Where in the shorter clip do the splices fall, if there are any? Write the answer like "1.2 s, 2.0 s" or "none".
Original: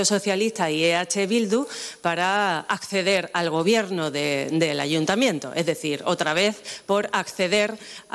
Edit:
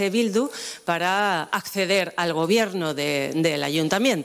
none